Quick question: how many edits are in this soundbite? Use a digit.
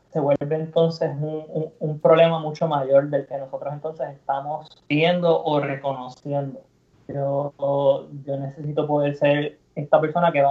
1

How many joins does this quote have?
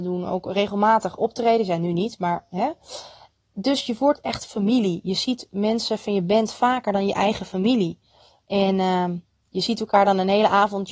0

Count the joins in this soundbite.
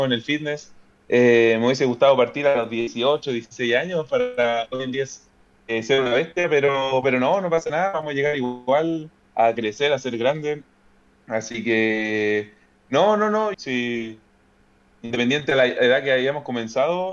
1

